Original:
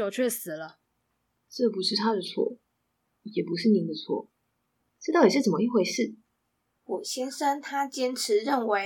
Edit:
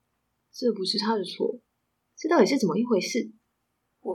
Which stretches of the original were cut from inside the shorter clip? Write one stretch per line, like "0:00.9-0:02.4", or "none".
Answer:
0:03.0-0:04.9